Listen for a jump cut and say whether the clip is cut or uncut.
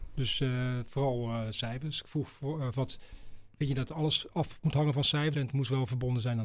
cut